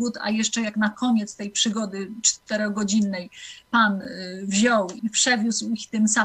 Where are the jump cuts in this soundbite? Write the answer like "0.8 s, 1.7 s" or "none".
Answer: 5.0 s